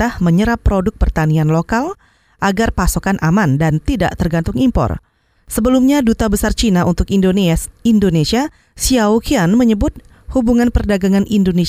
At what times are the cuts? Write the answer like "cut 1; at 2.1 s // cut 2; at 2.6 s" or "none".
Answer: cut 1; at 5.3 s